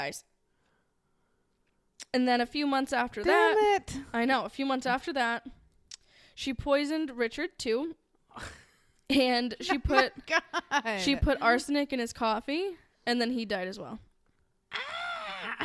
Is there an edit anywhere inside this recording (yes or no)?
no